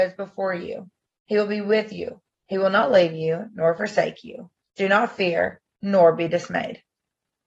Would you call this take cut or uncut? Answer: uncut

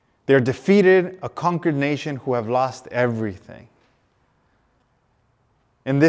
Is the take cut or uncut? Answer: uncut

